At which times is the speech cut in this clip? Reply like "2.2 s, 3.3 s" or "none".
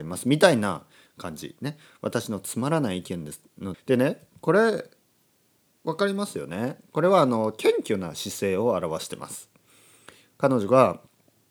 3.7 s